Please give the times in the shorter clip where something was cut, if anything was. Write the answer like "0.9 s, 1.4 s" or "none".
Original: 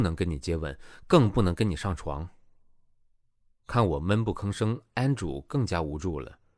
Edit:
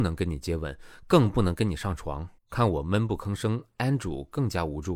2.4 s